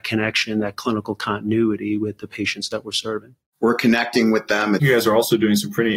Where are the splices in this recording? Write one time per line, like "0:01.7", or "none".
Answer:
0:03.5
0:04.8